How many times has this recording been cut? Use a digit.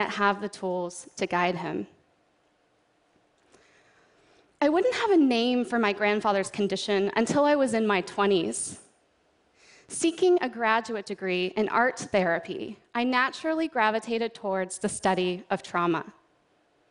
0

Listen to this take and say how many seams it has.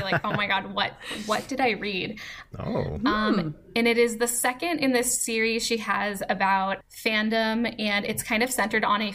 2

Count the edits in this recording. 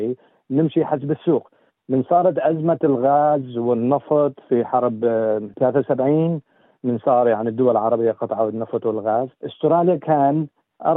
1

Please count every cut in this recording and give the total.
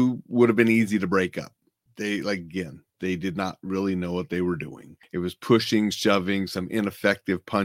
0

